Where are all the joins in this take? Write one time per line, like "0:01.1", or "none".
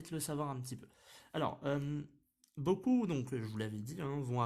none

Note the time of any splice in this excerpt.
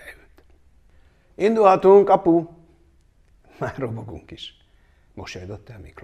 none

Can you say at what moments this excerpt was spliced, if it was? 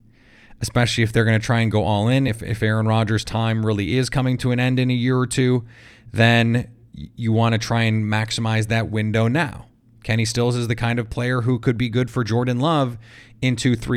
none

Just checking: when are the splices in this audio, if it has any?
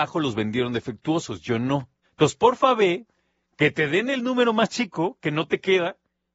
0:02.0

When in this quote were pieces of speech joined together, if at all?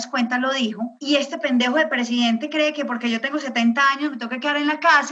0:01.0

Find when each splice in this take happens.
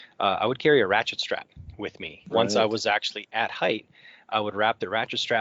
0:02.3

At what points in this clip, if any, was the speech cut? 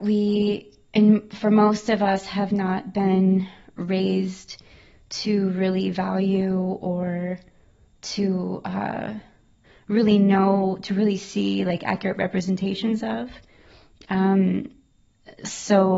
none

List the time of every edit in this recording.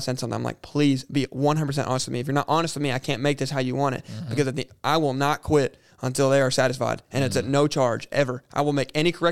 none

